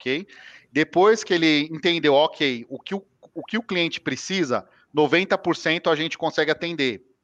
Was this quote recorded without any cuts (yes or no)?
yes